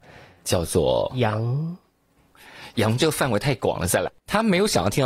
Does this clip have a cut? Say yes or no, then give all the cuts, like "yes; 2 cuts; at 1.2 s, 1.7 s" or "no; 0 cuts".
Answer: yes; 1 cut; at 4.1 s